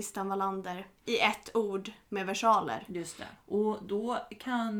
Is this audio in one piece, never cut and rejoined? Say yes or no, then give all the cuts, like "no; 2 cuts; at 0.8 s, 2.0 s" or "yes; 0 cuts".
no; 2 cuts; at 1.0 s, 3.4 s